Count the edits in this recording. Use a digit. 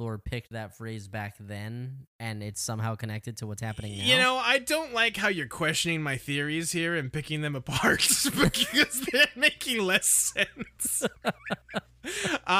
0